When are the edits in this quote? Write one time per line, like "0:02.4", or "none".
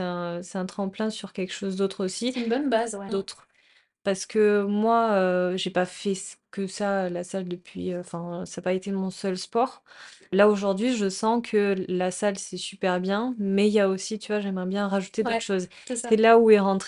0:03.1